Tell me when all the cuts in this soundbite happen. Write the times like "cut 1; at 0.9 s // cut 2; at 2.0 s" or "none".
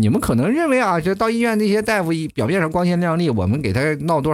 none